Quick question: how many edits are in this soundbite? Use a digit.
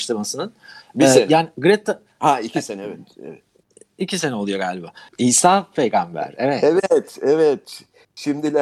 1